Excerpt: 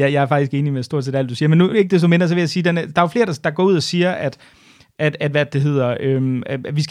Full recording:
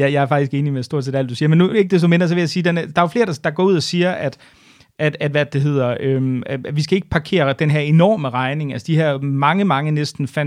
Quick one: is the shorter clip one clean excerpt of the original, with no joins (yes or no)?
yes